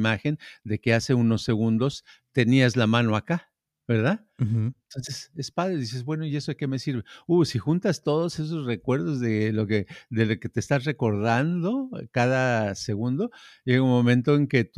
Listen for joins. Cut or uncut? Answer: uncut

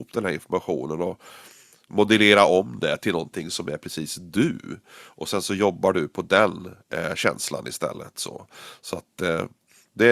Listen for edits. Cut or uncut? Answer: uncut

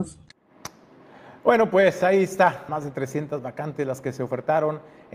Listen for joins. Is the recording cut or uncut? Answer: cut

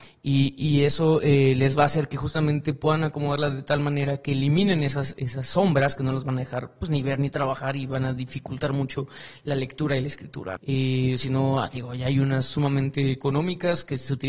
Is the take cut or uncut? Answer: cut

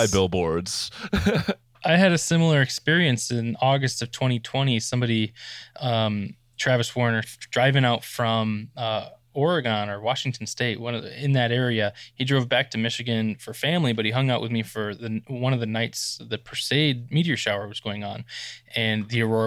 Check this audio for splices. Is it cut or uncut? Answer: cut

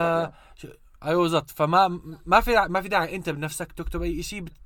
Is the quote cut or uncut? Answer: cut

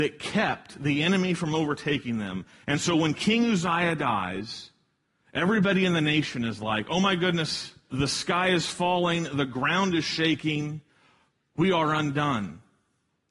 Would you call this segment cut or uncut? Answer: cut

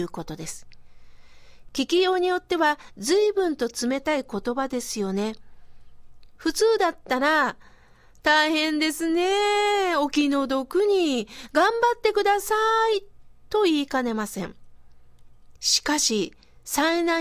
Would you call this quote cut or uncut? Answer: cut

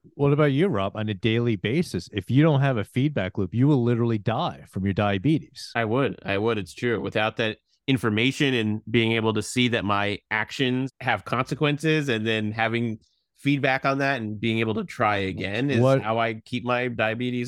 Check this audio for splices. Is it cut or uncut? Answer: uncut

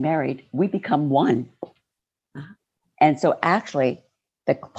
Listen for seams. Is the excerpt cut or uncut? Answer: uncut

